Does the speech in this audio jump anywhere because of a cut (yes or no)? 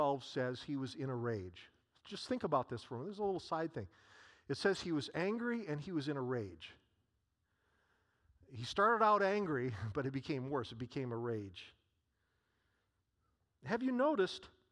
no